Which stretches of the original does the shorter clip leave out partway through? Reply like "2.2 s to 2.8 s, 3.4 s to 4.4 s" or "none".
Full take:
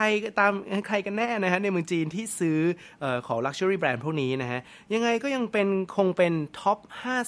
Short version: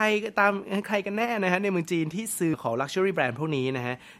2.5 s to 3.2 s